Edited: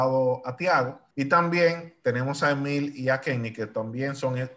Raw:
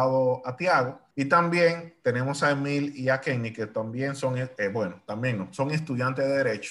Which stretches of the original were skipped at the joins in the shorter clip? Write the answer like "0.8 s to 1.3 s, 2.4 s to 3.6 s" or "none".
none